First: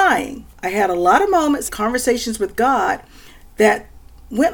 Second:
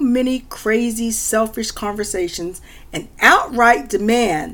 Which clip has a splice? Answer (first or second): first